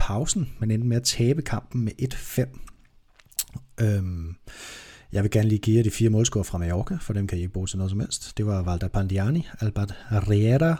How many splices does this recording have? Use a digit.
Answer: 0